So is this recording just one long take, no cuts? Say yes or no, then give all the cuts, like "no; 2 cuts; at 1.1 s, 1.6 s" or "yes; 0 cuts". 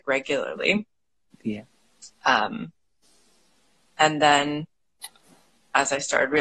yes; 0 cuts